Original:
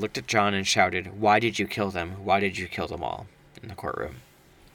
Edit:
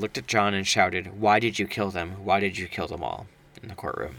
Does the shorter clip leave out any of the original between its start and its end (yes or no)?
no